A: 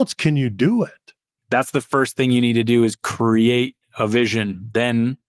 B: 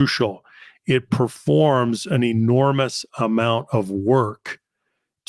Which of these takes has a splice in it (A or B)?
A